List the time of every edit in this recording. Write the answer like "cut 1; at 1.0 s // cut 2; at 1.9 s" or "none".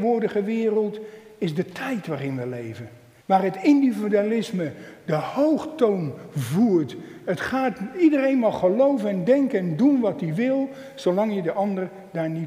cut 1; at 3.2 s